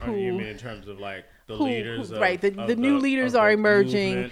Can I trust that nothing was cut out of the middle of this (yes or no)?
yes